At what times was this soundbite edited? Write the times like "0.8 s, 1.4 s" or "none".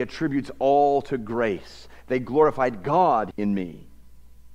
3.3 s